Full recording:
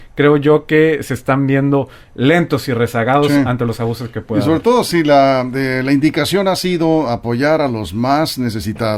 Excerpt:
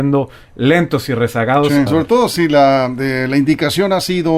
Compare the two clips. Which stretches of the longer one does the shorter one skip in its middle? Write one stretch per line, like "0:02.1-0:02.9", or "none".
0:03.5-0:04.4